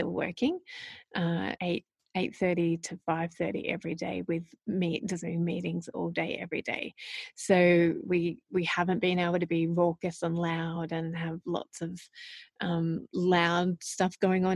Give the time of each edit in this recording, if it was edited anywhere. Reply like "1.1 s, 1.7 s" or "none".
1.6 s